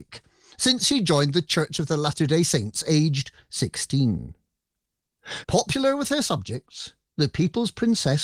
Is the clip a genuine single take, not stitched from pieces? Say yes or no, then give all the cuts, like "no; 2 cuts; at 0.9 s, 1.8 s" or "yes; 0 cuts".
no; 1 cut; at 5.4 s